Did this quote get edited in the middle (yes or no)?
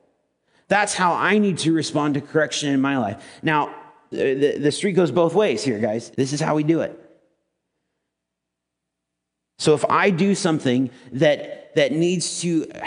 yes